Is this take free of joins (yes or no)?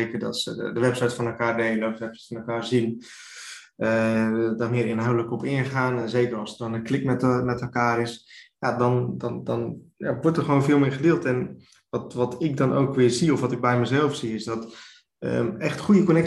yes